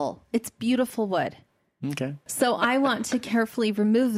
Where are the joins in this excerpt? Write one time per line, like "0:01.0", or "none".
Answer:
0:02.3